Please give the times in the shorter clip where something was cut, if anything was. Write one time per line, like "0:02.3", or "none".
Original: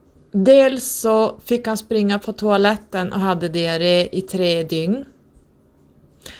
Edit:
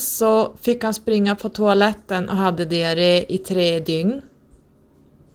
none